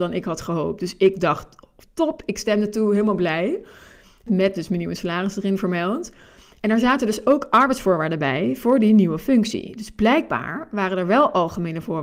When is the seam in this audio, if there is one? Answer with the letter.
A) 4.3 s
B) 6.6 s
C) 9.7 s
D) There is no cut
A